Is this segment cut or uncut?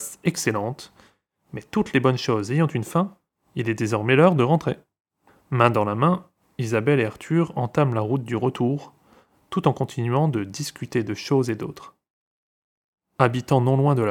uncut